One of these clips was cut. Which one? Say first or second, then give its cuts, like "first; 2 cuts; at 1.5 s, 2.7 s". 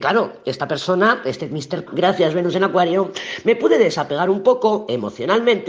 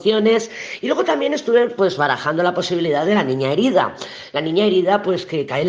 first; 1 cut; at 1.9 s